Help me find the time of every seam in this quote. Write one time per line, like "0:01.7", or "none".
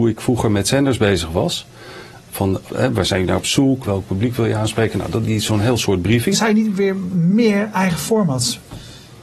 0:02.6
0:03.8
0:06.3